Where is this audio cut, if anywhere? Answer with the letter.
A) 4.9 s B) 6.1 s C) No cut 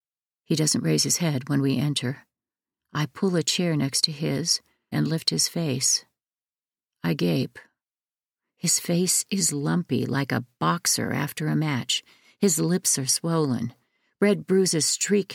A